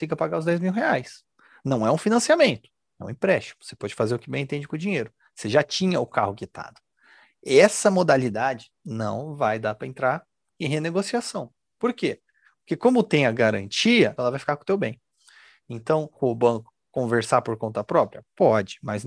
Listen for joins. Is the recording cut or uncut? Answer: cut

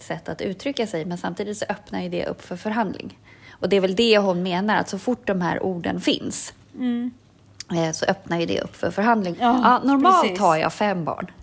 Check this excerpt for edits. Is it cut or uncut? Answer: cut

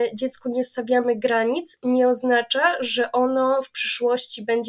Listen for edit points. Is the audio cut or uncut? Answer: uncut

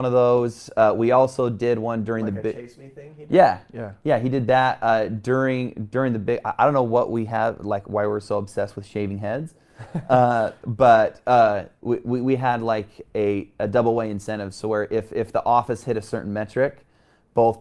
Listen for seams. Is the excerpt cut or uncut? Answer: uncut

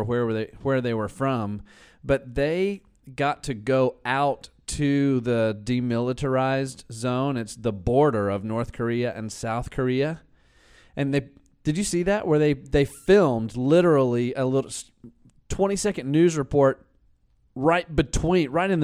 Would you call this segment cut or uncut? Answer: uncut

